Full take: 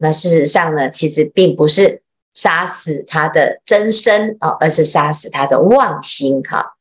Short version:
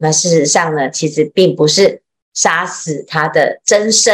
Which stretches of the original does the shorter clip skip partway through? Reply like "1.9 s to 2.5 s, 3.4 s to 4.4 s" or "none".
none

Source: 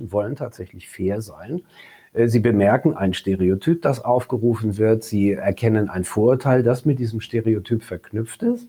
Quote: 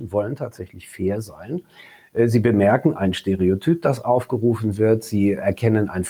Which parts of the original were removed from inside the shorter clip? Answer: none

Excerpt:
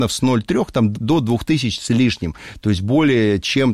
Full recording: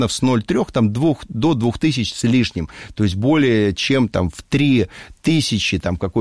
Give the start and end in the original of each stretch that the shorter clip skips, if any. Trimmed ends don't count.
0.9 s to 1.3 s

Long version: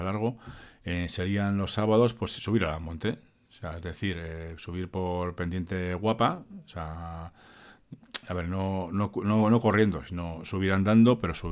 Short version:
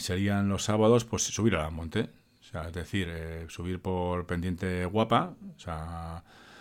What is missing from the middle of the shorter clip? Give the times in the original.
none

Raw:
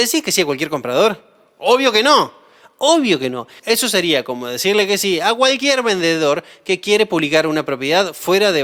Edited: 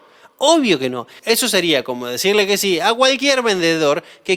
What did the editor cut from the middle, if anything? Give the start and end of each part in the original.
none

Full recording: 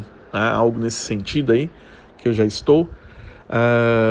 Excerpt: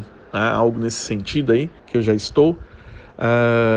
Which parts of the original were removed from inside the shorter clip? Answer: 1.8 s to 2.1 s

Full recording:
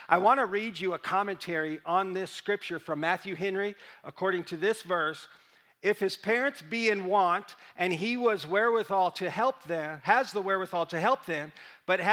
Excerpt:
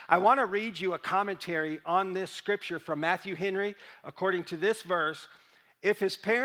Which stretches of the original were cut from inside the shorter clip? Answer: none

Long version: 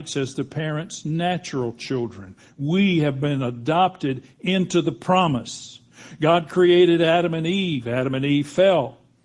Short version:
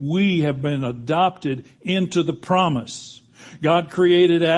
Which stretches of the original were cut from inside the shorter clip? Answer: none

